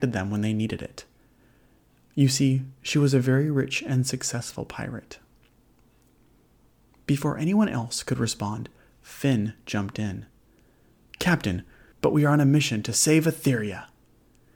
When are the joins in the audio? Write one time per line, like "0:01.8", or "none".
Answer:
0:11.9